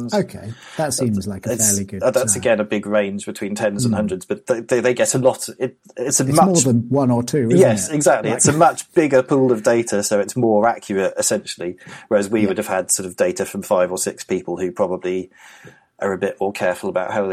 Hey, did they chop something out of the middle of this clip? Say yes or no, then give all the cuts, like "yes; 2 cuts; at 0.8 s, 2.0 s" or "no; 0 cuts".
no; 0 cuts